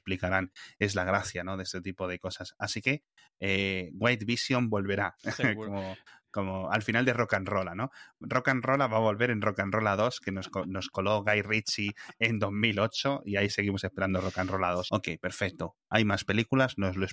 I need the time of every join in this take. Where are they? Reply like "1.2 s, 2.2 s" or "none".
14.9 s